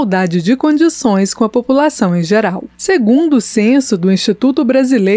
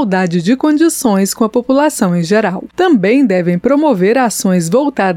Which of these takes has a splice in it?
second; 1 cut; at 2.7 s

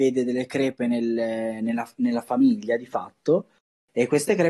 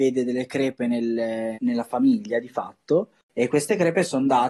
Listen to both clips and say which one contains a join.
second; 2 cuts; at 1.5 s, 3.2 s

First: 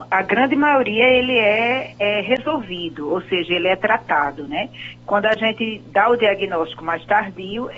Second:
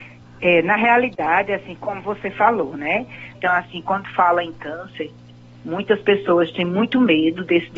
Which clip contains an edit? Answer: second; 1 cut; at 3.3 s

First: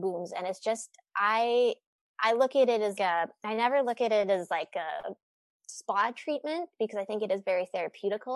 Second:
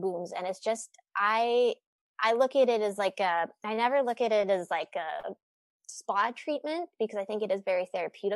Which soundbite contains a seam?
first; 1 cut; at 3.0 s

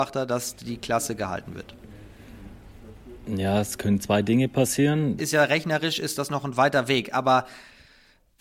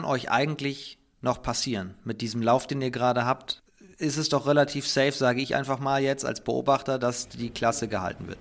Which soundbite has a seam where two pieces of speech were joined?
first; 1 cut; at 5.2 s

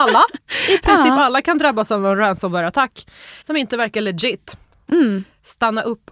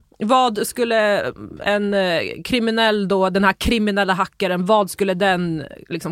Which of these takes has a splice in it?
first; 1 cut; at 3.4 s

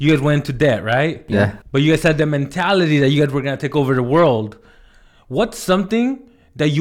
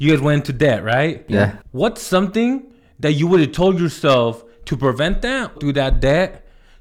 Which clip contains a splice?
second; 2 cuts; at 1.7 s, 5.5 s

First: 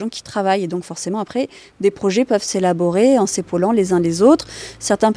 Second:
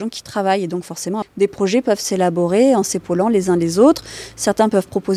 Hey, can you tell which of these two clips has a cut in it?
second; 1 cut; at 1.2 s

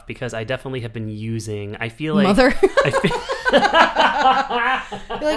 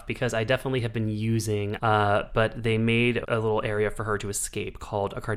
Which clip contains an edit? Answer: second; 2 cuts; at 1.8 s, 3.2 s

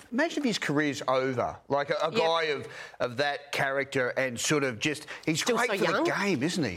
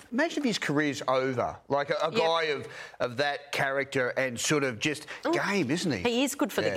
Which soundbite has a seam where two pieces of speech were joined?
second; 1 cut; at 5.2 s

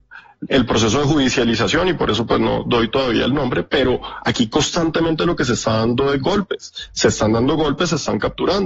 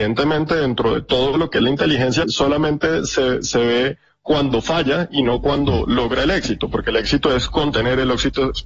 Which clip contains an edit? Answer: second; 1 cut; at 2.2 s

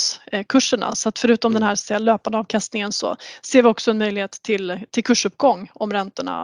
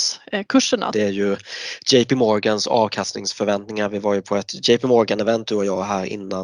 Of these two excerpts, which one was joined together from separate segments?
second; 1 cut; at 0.9 s

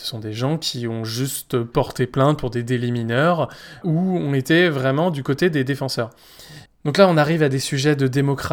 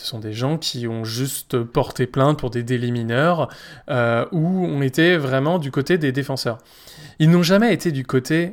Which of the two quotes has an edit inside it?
first; 2 cuts; at 3.8 s, 6.7 s

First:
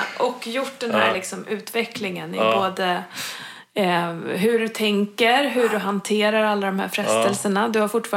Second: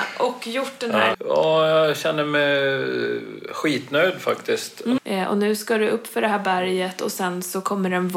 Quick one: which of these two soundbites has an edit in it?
second; 2 cuts; at 1.1 s, 5.0 s

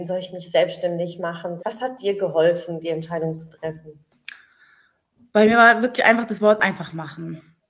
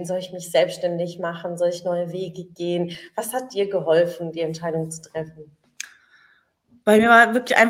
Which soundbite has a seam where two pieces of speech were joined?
first; 1 cut; at 1.6 s

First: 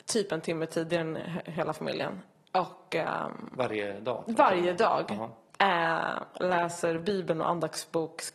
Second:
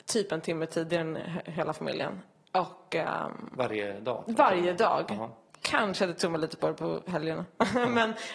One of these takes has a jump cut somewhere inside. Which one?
first; 1 cut; at 5.6 s

